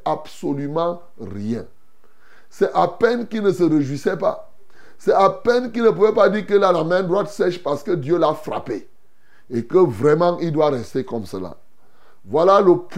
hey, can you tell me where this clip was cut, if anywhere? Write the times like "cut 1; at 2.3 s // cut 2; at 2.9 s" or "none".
none